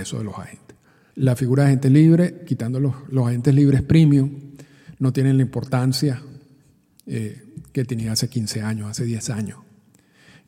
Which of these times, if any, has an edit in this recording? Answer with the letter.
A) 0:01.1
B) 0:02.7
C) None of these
A